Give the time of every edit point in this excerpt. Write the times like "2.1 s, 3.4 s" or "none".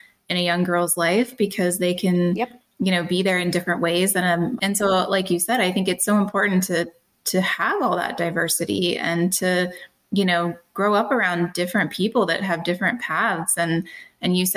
4.6 s